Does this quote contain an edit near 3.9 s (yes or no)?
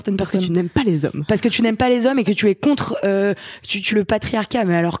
yes